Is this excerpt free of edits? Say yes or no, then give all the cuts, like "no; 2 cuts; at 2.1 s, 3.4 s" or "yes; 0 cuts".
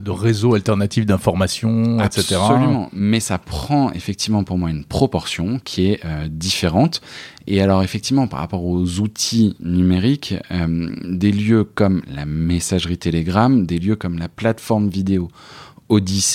yes; 0 cuts